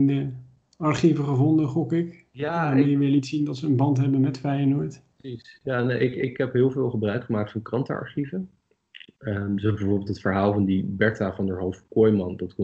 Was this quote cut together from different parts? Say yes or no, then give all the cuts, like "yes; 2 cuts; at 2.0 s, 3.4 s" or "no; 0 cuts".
no; 0 cuts